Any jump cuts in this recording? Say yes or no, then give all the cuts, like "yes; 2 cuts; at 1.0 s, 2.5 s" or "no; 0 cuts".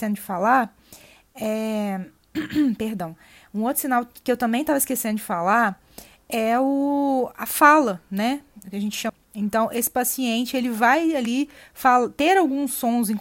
no; 0 cuts